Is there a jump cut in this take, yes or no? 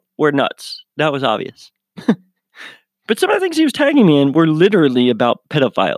no